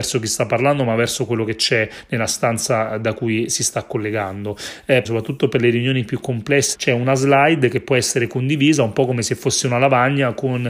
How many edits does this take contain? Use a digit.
2